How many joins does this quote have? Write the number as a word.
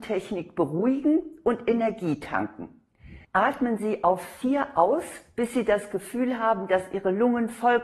one